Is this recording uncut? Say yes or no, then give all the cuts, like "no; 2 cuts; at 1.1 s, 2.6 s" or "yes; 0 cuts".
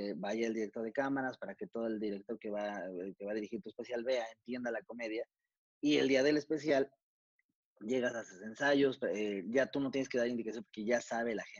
yes; 0 cuts